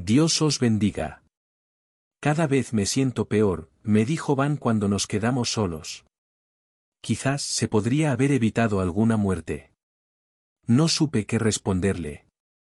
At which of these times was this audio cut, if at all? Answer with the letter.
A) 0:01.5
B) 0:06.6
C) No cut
C